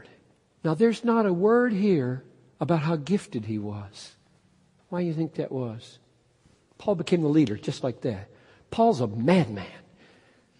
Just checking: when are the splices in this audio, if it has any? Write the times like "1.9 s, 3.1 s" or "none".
4.8 s